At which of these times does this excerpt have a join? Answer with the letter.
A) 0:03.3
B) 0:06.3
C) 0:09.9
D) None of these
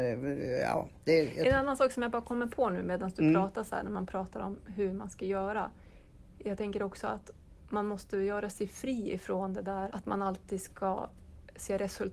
C